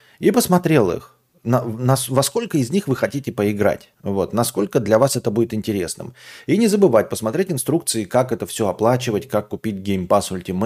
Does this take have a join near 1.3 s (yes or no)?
no